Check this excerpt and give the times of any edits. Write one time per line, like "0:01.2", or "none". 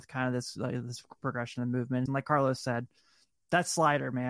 0:02.1